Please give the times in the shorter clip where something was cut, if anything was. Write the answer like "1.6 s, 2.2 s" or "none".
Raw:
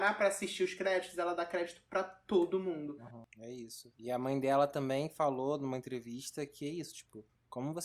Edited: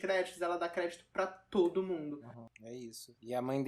none